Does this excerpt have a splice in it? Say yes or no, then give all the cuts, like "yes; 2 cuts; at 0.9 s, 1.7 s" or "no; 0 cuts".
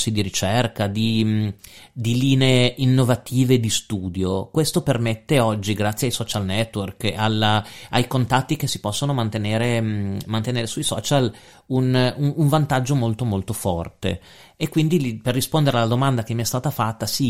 no; 0 cuts